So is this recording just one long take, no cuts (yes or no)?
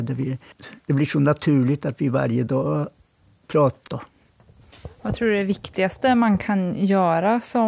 no